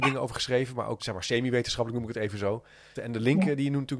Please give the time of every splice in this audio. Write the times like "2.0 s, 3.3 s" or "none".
1.0 s, 3.0 s

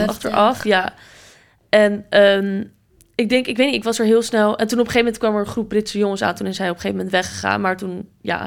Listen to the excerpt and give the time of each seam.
none

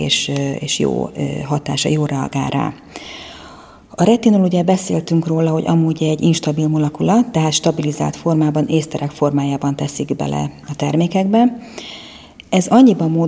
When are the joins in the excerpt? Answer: none

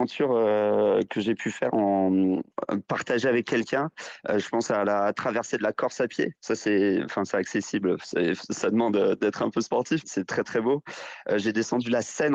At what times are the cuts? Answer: 10.0 s

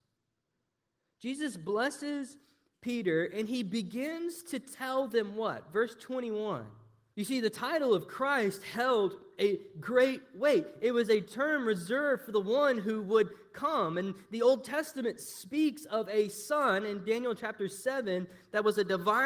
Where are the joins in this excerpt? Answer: 7.1 s

